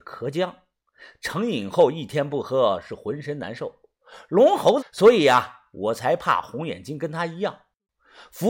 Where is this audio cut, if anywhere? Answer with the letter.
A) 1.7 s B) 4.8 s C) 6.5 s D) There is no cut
B